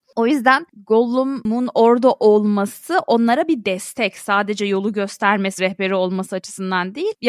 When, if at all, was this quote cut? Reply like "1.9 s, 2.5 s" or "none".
5.6 s